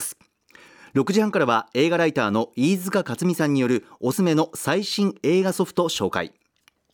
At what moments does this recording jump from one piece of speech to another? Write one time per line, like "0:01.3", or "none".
0:04.1